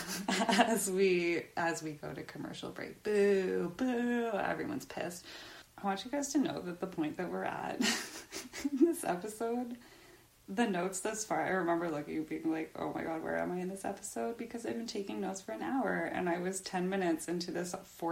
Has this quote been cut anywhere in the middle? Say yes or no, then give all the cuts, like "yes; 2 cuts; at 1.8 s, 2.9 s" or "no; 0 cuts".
yes; 1 cut; at 3.8 s